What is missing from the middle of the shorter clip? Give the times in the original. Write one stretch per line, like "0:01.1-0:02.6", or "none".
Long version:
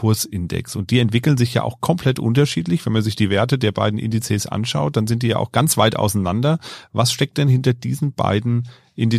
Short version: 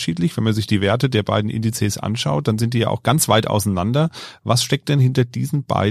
none